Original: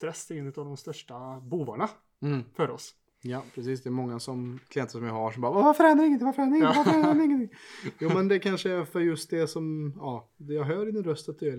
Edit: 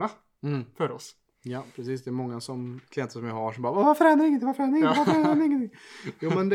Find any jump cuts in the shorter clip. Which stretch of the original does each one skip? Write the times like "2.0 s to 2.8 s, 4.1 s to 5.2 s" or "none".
none